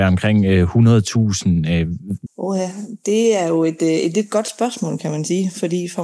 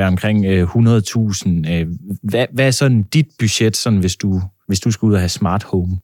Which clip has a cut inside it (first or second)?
first